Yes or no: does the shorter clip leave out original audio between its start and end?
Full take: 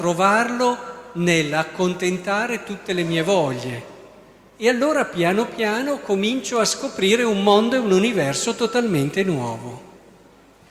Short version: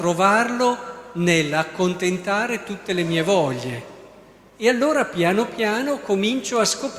no